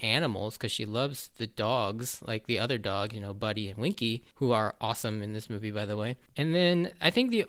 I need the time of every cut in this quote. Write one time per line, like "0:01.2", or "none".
0:06.3